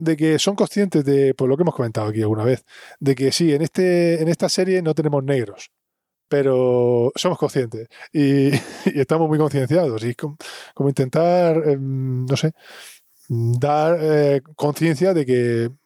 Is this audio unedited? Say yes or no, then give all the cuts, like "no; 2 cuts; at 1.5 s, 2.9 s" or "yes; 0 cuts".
yes; 0 cuts